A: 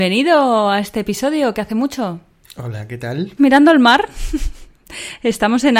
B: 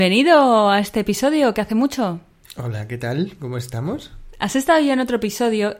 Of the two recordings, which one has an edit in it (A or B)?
A